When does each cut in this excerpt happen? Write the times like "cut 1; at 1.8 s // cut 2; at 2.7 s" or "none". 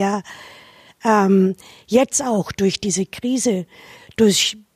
none

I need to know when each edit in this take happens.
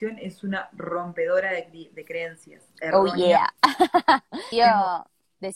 cut 1; at 4.5 s

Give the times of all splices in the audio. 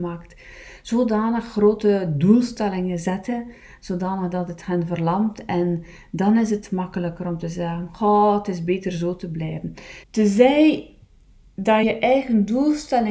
cut 1; at 10.0 s // cut 2; at 11.8 s

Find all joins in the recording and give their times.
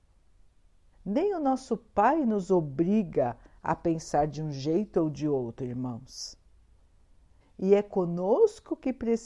cut 1; at 0.9 s // cut 2; at 7.4 s

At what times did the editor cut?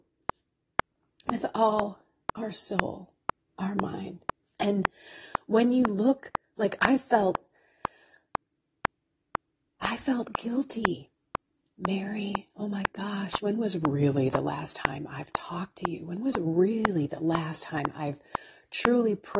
cut 1; at 4.4 s

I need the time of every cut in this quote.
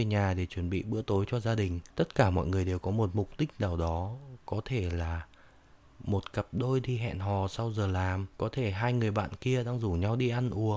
cut 1; at 1.9 s // cut 2; at 8.3 s

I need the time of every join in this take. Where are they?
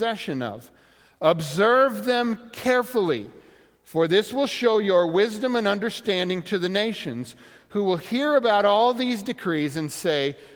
none

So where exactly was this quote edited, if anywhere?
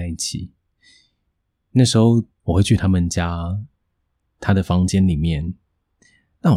cut 1; at 2.4 s

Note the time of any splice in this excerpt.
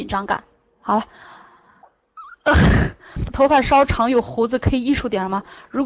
cut 1; at 3.2 s

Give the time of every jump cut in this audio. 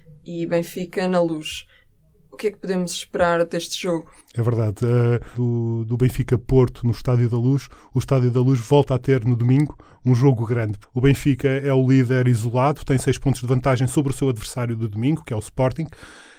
cut 1; at 5.3 s // cut 2; at 10.8 s

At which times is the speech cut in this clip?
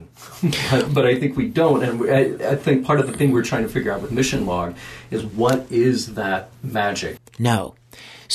cut 1; at 7.2 s

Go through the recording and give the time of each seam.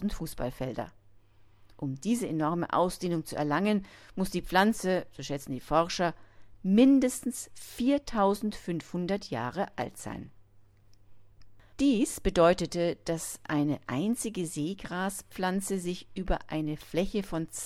cut 1; at 11.7 s

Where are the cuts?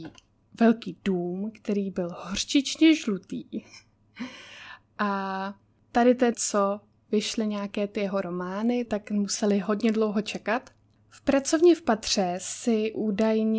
cut 1; at 6.3 s // cut 2; at 8.9 s

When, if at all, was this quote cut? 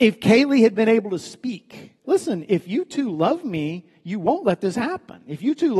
cut 1; at 2.0 s

